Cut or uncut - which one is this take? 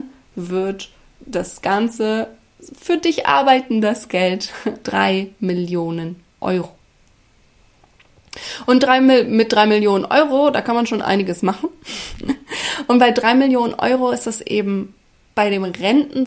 cut